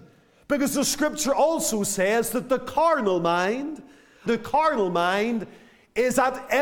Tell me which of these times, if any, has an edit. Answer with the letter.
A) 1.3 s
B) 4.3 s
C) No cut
B